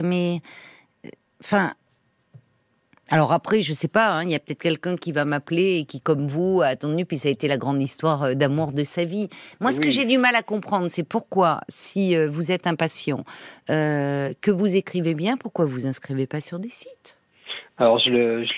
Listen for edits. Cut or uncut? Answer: uncut